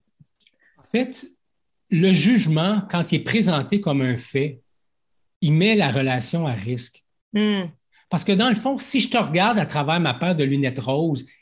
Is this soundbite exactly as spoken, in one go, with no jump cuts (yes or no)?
yes